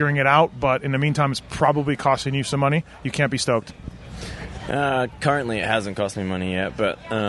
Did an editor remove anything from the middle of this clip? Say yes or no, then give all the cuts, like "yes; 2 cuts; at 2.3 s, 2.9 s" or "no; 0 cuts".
no; 0 cuts